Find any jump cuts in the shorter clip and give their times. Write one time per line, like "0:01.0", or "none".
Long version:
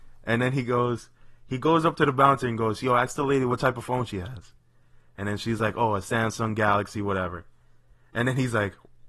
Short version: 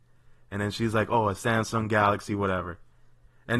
none

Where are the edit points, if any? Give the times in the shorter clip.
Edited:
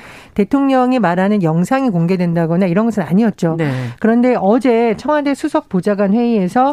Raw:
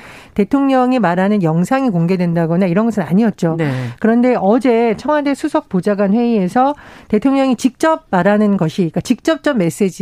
none

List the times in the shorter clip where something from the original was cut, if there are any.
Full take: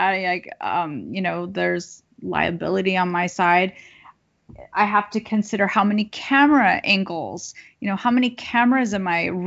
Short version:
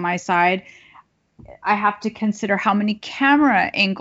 none

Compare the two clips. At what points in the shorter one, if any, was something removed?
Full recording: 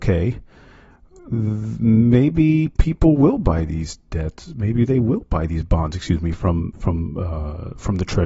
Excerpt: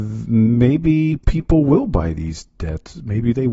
none

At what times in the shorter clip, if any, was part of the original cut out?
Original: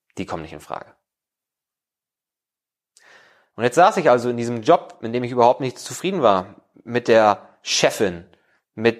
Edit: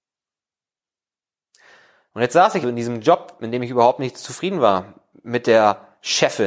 0:02.6

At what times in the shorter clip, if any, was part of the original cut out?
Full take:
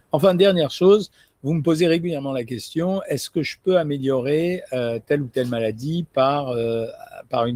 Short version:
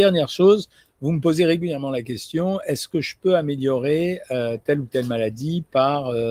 none

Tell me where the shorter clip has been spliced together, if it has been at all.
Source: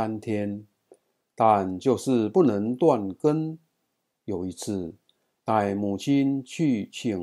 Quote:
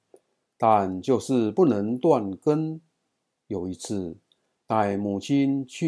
none

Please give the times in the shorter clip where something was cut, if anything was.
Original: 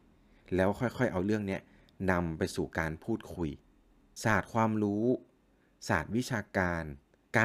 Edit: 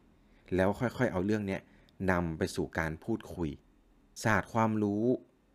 none

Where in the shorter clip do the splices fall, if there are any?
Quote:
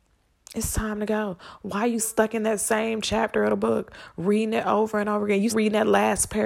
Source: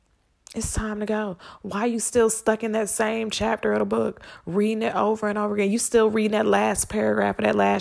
0:02.0
0:05.5

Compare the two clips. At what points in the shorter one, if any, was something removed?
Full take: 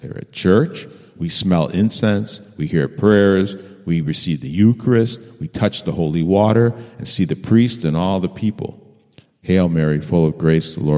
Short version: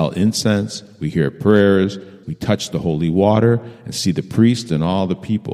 0:02.2

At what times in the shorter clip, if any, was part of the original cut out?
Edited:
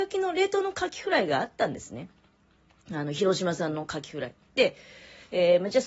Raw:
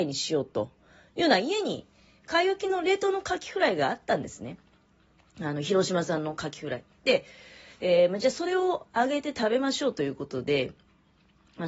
none

